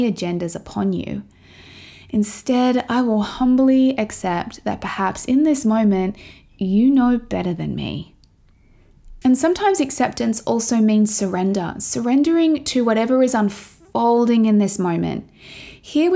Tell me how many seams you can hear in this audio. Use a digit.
1